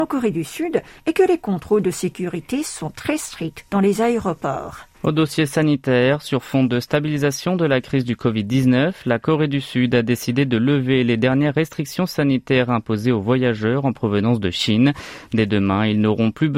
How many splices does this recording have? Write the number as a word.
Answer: one